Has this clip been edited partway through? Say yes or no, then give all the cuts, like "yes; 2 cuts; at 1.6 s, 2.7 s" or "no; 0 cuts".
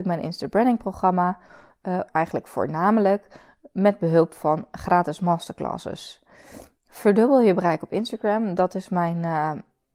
yes; 1 cut; at 2.1 s